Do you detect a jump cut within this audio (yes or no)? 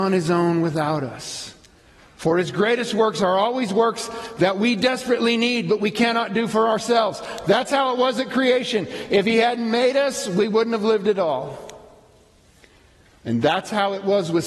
no